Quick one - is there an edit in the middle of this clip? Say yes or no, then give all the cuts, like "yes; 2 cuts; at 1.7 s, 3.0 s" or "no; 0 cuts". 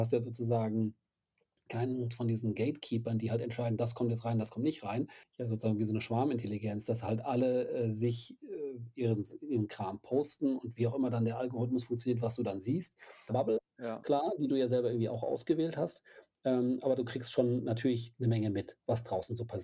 yes; 2 cuts; at 5.2 s, 13.3 s